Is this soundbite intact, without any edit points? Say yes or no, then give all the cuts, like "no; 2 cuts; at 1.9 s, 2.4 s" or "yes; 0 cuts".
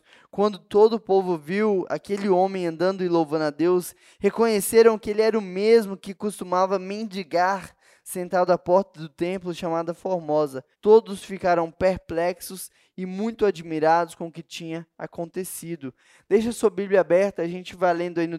no; 1 cut; at 10.7 s